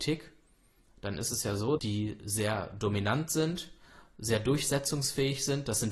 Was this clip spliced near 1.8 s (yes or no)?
yes